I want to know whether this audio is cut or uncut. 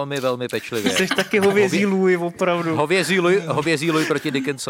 uncut